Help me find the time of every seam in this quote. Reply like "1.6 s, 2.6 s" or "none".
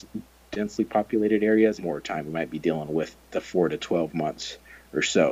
1.8 s